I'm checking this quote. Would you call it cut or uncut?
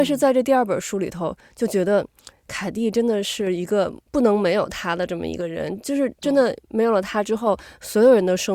uncut